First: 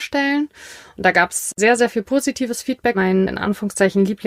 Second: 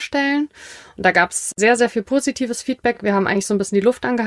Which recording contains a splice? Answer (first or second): first